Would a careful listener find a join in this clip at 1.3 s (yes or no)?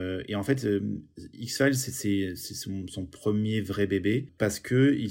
no